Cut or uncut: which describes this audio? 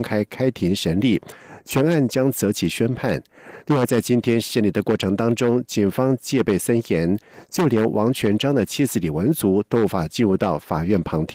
uncut